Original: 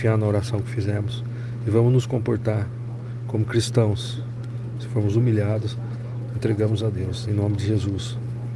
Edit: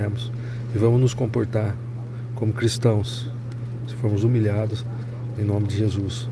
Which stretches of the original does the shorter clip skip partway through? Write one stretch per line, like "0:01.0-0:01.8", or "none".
0:06.3-0:07.2